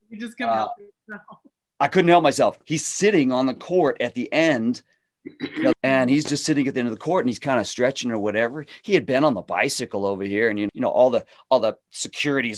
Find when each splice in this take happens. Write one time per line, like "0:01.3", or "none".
0:05.7
0:10.7